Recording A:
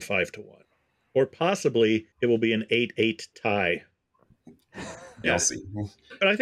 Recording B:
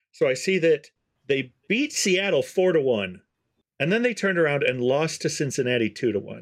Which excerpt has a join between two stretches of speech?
A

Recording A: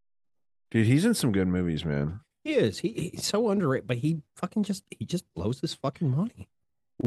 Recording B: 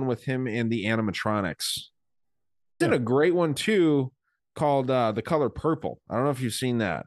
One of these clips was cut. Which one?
B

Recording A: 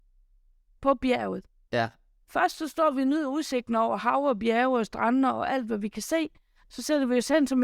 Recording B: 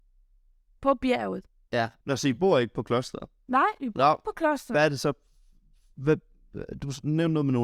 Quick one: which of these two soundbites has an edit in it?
B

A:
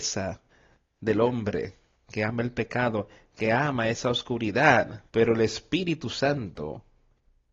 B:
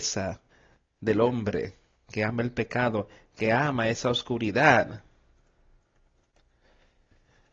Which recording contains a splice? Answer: A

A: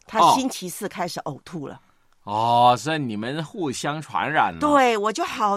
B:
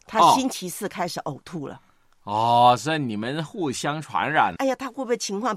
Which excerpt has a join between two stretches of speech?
B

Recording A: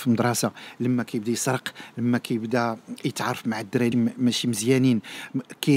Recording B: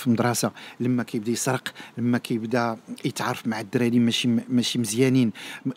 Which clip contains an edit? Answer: A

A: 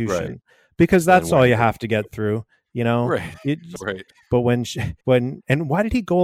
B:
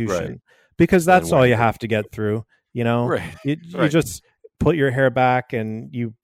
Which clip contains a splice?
A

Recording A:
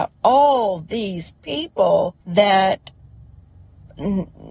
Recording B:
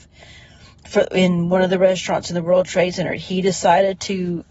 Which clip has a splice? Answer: A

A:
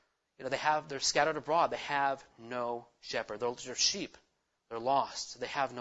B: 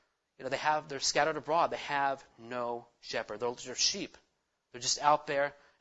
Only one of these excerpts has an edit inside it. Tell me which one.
A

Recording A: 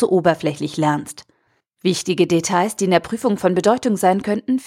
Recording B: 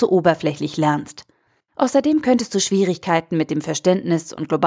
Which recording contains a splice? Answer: B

